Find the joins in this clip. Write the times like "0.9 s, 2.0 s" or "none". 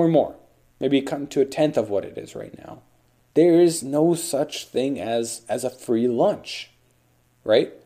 3.3 s